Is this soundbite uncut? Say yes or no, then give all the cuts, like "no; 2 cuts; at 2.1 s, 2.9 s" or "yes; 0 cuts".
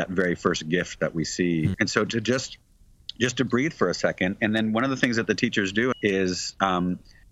no; 2 cuts; at 1.7 s, 5.9 s